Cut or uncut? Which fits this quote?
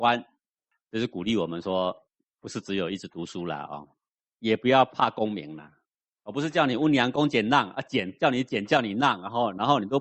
uncut